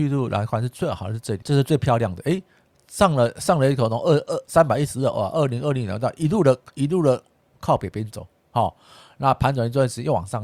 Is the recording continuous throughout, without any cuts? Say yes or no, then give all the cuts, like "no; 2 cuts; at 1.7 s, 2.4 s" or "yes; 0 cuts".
no; 1 cut; at 1.4 s